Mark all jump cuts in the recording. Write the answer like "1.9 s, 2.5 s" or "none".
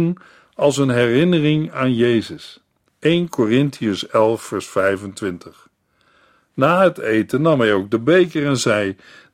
2.9 s